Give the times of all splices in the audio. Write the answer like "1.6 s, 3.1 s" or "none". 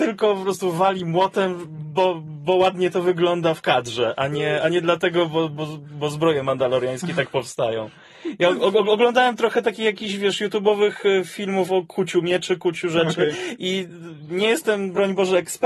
none